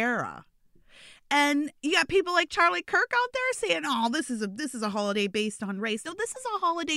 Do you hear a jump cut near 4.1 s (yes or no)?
no